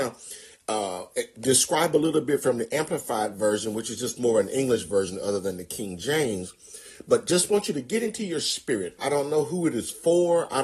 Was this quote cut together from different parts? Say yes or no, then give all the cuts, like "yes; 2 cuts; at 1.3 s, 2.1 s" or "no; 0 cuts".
yes; 1 cut; at 9.0 s